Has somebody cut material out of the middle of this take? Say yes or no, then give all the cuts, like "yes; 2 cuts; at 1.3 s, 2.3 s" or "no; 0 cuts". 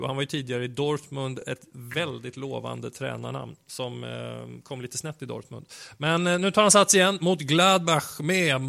no; 0 cuts